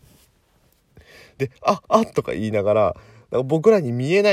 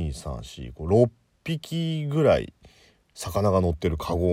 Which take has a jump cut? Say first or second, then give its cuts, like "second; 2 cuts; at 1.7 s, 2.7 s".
first; 1 cut; at 1.8 s